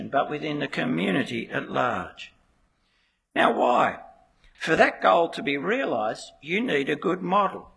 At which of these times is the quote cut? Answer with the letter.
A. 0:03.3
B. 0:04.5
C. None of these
B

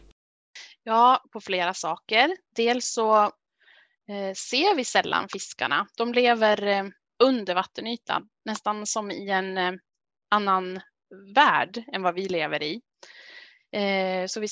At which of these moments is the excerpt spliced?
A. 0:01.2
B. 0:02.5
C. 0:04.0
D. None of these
A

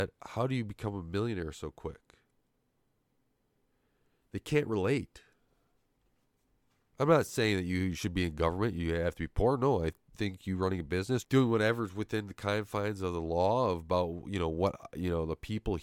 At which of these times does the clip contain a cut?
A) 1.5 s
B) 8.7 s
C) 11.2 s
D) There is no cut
C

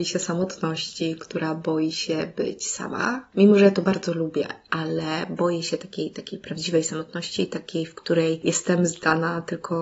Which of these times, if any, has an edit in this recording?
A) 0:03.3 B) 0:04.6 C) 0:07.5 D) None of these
D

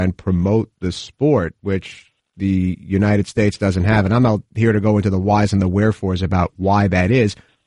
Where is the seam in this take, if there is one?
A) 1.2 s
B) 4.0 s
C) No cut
C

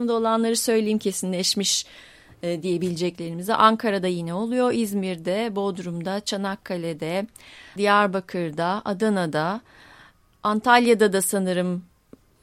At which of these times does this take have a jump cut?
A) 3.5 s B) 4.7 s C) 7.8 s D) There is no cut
C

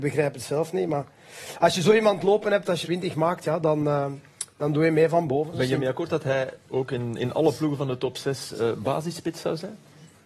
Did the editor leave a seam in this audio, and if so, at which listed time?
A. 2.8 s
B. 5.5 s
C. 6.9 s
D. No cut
A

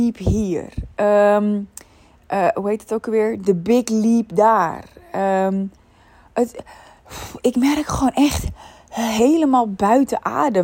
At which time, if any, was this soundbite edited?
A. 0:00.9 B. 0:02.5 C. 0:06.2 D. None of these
B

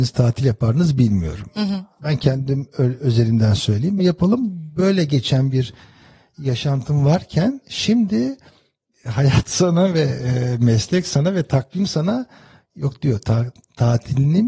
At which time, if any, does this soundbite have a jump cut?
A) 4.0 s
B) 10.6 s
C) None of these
A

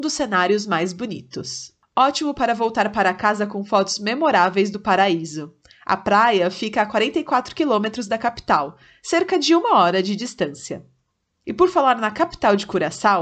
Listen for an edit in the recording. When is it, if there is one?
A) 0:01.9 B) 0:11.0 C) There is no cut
C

